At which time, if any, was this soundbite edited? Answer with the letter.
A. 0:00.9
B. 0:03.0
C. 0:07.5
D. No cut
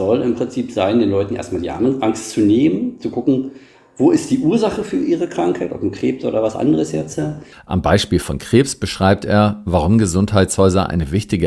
C